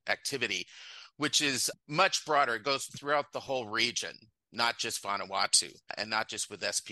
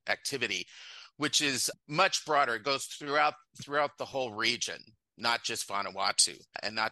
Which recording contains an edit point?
first; 1 cut; at 2.9 s

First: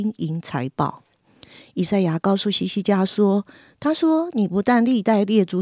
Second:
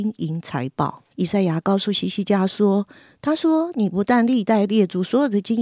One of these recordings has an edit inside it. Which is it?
second; 1 cut; at 1.1 s

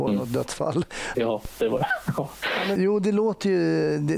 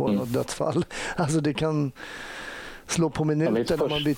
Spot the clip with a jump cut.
first; 2 cuts; at 1.1 s, 2.8 s

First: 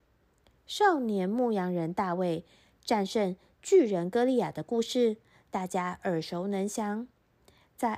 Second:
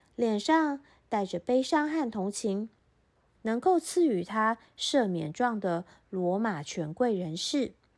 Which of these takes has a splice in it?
second; 1 cut; at 3.3 s

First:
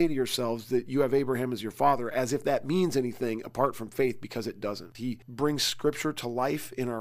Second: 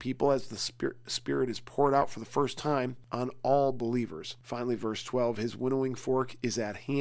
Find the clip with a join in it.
first; 1 cut; at 4.9 s

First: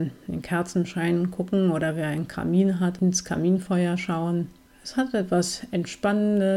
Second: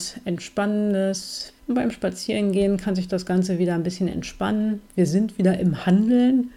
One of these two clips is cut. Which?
second; 1 cut; at 1.6 s

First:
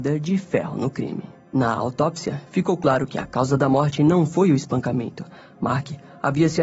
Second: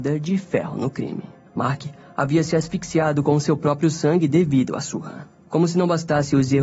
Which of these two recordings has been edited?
second; 1 cut; at 1.4 s

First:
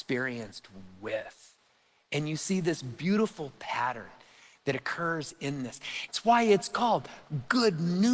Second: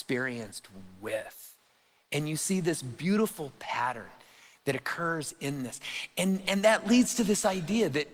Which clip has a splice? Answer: first; 1 cut; at 6.1 s

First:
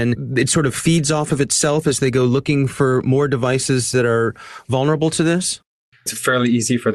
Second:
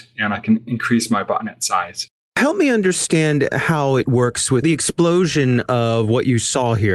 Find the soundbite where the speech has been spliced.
first; 1 cut; at 5.9 s

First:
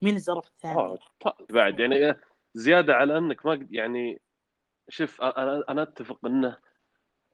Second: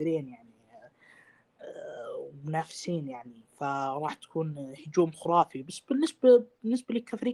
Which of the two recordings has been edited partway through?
first; 1 cut; at 1.5 s

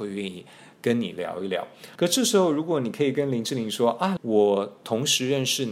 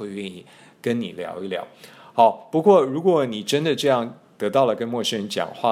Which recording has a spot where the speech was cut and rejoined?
first; 2 cuts; at 2.0 s, 4.2 s

